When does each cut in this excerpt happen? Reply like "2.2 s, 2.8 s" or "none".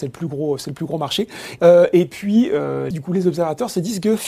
1.6 s, 2.9 s